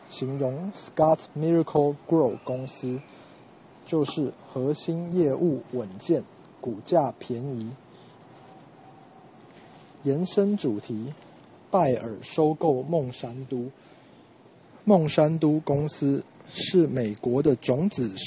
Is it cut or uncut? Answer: uncut